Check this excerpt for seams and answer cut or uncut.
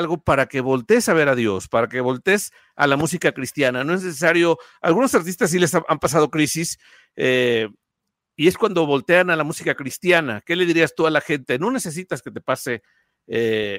uncut